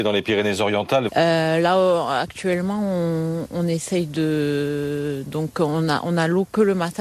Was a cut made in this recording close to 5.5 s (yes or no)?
no